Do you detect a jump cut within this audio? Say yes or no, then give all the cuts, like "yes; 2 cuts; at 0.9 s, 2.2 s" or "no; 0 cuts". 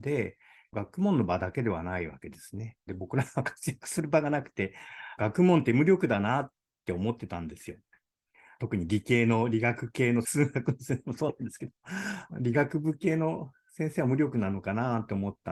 yes; 2 cuts; at 2.9 s, 5.2 s